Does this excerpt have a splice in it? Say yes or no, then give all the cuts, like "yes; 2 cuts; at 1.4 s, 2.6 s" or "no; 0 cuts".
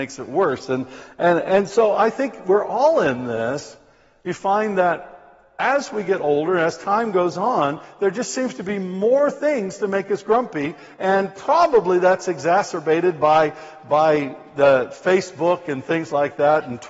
no; 0 cuts